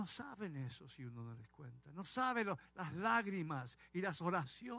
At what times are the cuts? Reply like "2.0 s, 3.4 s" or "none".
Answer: none